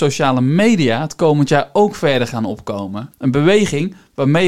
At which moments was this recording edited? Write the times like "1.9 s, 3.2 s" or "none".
none